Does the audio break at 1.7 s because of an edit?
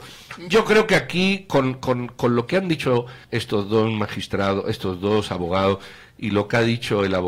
no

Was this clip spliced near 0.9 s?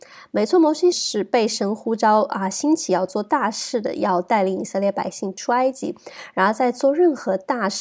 yes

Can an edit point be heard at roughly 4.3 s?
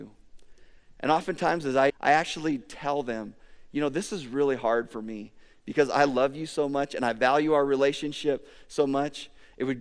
no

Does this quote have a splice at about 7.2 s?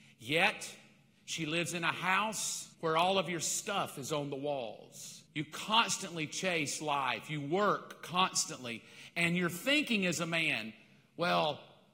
no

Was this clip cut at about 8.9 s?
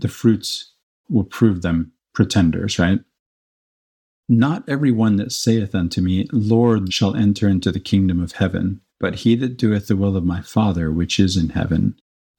yes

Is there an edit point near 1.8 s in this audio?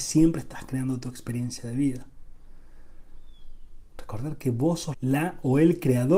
no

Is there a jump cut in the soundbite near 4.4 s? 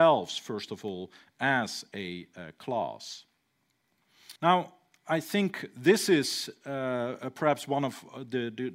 yes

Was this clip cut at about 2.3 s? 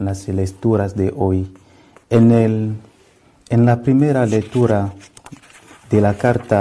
no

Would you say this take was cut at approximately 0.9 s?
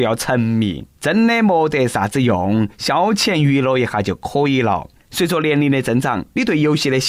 yes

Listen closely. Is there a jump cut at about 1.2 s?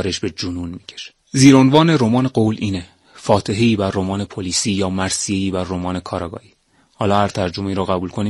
yes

